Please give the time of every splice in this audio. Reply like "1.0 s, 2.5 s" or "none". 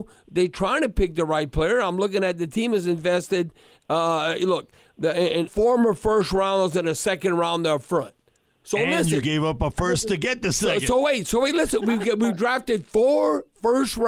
5.5 s